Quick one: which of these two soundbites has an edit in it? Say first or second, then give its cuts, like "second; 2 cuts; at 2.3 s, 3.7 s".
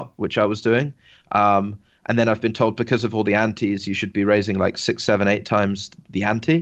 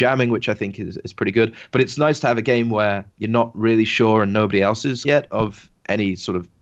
second; 2 cuts; at 3.1 s, 5.0 s